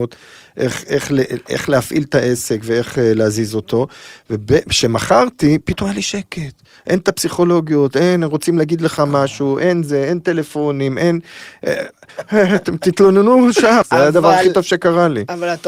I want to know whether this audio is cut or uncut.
cut